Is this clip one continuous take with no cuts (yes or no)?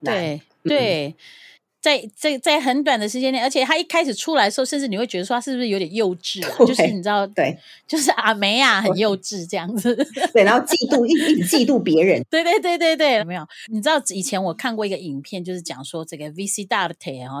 no